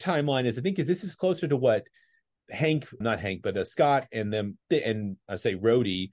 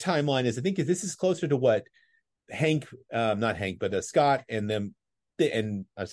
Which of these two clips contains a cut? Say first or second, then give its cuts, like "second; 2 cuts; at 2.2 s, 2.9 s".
first; 2 cuts; at 3.0 s, 4.6 s